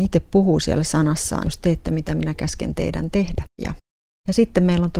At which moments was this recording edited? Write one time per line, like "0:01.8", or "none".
0:01.4
0:03.6